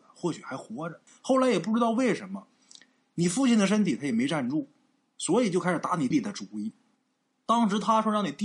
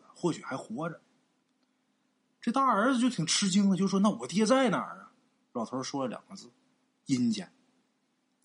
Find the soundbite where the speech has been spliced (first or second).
first